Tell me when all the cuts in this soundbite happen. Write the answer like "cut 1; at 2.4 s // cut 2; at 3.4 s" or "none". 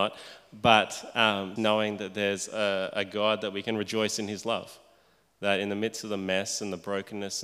cut 1; at 1.6 s